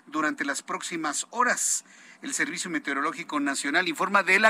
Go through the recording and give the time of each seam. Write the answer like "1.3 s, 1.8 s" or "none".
none